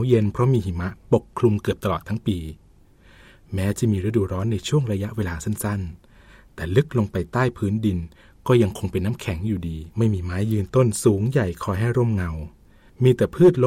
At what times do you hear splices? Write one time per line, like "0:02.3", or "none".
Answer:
0:09.9